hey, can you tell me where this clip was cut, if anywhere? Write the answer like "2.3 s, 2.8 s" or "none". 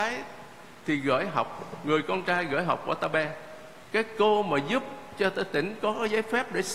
3.8 s